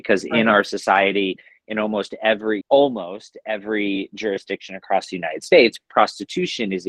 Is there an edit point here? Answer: yes; 1 cut; at 2.6 s

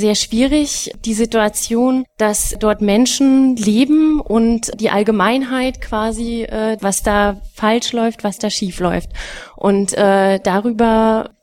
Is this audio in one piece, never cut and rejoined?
no; 1 cut; at 6.8 s

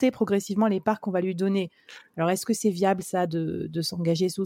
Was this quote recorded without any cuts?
yes; 0 cuts

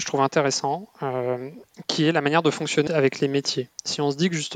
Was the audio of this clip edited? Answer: yes; 1 cut; at 2.9 s

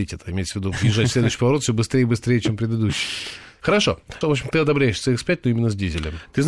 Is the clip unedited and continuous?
no; 1 cut; at 4.2 s

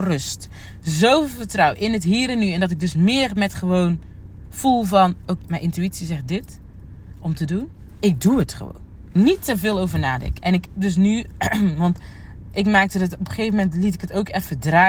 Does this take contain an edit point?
yes; 2 cuts; at 5.4 s, 10.4 s

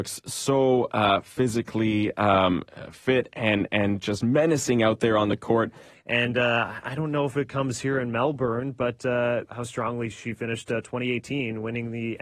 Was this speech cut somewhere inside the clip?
yes; 2 cuts; at 5.9 s, 9.5 s

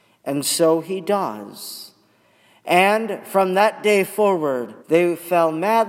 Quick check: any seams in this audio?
yes; 1 cut; at 4.8 s

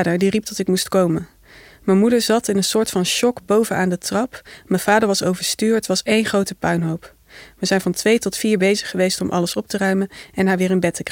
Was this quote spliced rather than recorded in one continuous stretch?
no; 0 cuts

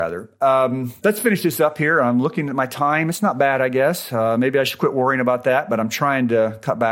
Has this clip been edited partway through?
no; 0 cuts

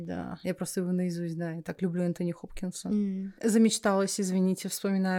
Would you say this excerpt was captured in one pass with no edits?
no; 1 cut; at 3.4 s

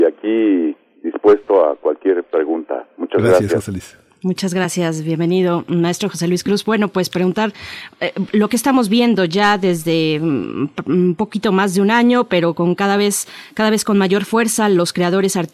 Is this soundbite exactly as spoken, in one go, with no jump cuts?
yes; 0 cuts

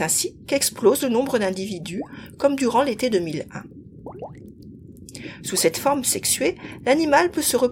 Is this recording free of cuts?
yes; 0 cuts

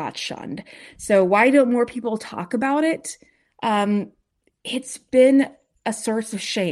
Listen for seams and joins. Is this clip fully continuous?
yes; 0 cuts

